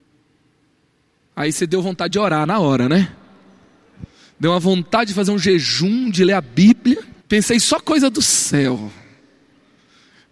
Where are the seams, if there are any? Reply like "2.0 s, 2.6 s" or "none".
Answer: 7.2 s

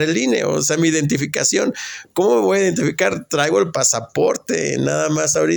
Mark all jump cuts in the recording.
none

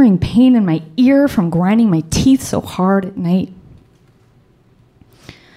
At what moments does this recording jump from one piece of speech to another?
none

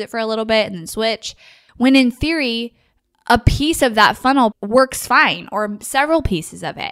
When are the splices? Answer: 1.7 s, 4.5 s

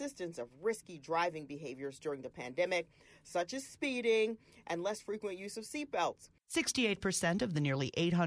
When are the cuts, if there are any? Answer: 6.4 s

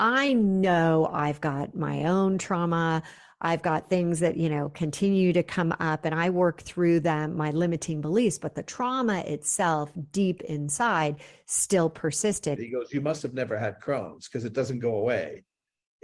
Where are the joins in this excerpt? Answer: 12.6 s

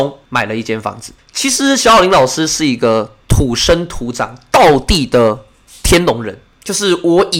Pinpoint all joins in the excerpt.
1.2 s

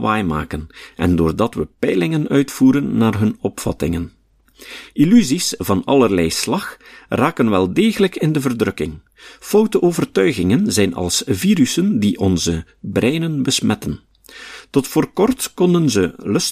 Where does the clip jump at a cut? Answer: none

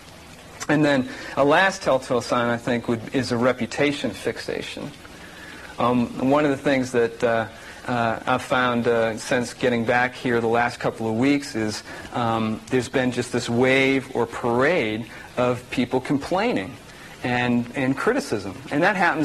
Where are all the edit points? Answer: none

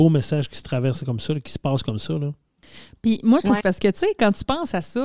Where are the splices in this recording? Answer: 3.6 s

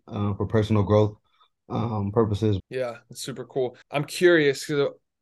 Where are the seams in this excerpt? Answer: 2.6 s, 3.8 s

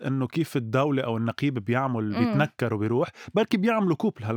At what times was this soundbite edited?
none

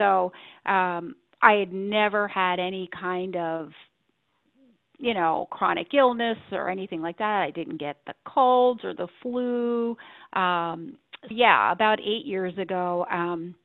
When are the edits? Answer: 10.3 s, 11.3 s

